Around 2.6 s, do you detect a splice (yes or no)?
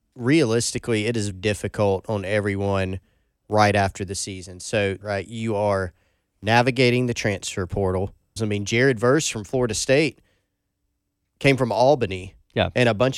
no